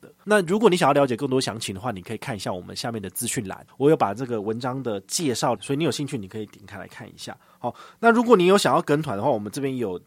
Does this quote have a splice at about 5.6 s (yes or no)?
yes